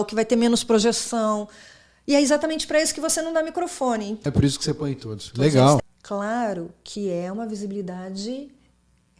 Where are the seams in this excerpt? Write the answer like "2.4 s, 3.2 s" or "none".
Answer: 4.3 s, 5.8 s